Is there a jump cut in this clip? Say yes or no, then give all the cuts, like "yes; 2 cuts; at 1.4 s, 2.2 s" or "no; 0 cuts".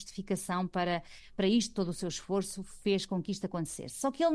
no; 0 cuts